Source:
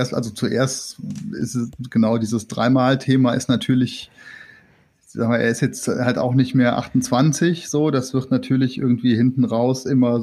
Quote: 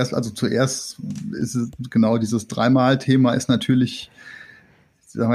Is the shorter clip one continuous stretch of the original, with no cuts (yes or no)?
yes